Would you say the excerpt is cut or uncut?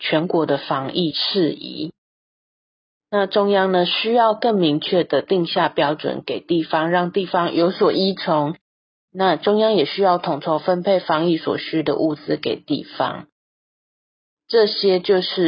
uncut